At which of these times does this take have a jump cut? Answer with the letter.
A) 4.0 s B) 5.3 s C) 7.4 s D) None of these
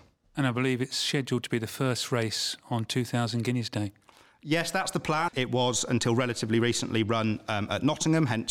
B